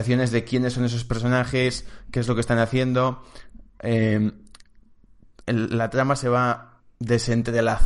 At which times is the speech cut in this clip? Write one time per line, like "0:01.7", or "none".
none